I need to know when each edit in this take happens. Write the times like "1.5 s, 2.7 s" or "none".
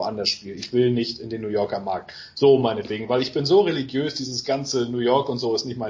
none